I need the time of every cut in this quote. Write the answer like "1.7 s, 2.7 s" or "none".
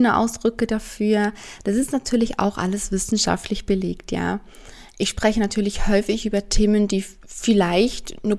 none